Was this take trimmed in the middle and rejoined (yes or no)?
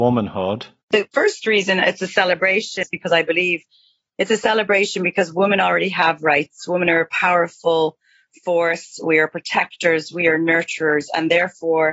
no